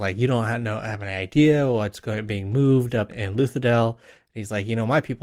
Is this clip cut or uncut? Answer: cut